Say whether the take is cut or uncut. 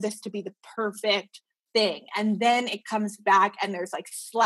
uncut